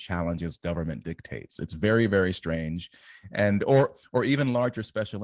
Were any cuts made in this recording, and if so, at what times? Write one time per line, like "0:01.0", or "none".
none